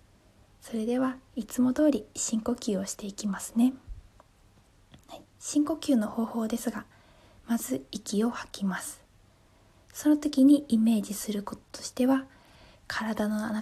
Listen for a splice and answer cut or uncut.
uncut